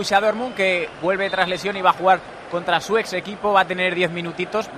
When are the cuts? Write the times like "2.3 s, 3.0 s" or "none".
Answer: none